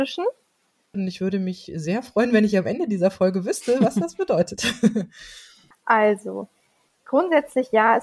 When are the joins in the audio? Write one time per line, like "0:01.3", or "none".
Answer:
0:00.9
0:05.7